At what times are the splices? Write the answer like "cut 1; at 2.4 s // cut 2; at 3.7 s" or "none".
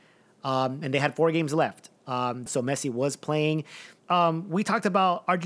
cut 1; at 2.5 s // cut 2; at 4.0 s